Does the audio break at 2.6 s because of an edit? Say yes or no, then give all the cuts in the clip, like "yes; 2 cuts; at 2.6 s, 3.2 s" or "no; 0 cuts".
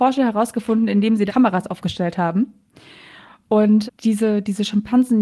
no; 2 cuts; at 1.3 s, 3.9 s